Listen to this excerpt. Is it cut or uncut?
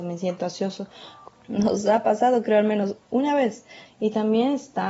cut